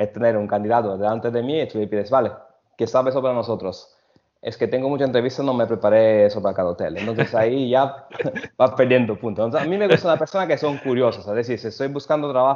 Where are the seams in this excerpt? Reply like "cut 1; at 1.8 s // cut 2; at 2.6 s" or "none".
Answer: none